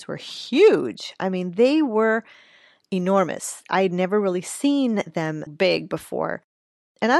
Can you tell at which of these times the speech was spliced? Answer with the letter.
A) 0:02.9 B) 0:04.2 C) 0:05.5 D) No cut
C